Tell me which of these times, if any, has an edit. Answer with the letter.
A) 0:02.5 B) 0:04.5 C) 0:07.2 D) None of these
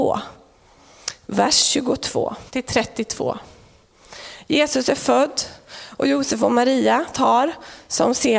A